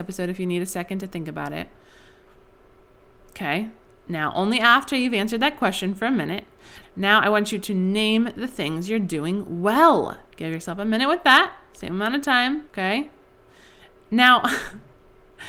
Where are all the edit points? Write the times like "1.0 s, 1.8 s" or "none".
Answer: 6.8 s, 10.2 s, 12.7 s